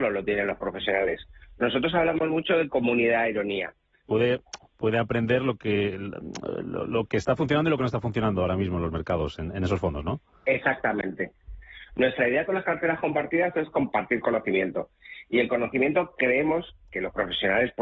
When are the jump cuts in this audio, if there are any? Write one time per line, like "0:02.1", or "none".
0:04.0

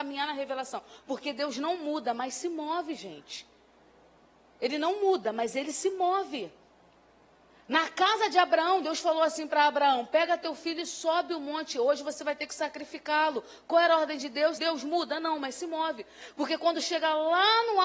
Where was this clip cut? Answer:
0:14.6

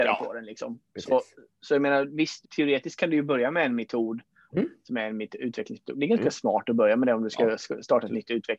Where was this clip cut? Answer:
0:02.4
0:04.5

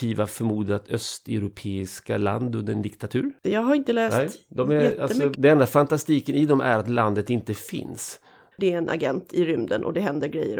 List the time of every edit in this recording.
0:03.4
0:05.3
0:08.5

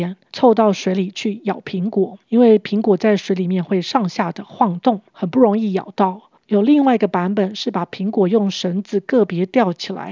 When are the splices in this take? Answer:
0:06.4

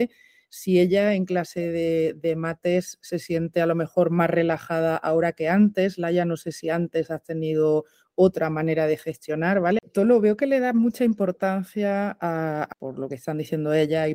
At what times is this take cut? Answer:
0:09.8
0:12.7

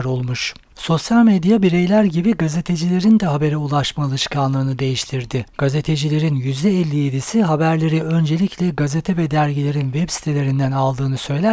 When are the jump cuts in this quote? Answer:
none

